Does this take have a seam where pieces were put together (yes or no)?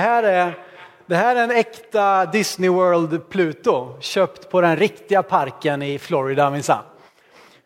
no